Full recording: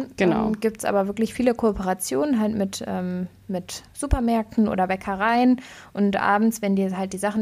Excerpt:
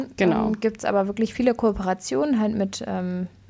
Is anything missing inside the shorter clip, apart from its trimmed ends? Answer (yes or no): no